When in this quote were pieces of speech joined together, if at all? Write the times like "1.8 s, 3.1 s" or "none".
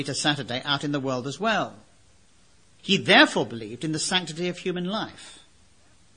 2.8 s